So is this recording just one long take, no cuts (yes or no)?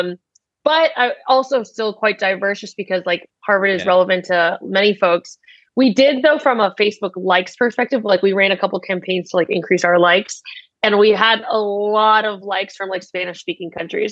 yes